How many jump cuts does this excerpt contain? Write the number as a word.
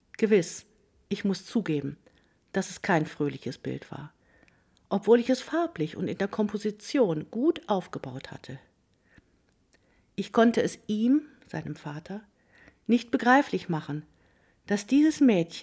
zero